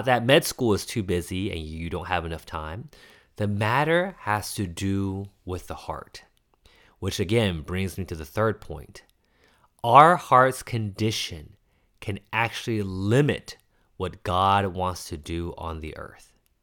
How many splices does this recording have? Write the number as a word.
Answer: zero